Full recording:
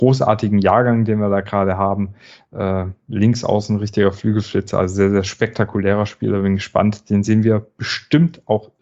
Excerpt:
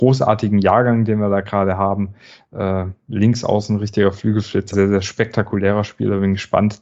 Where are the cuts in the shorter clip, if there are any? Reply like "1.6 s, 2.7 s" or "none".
4.7 s